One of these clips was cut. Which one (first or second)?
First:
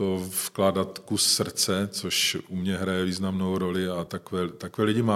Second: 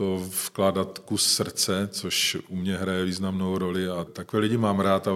second